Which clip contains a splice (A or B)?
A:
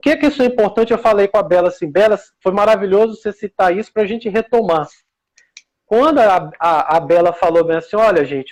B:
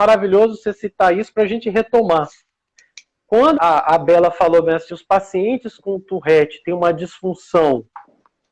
B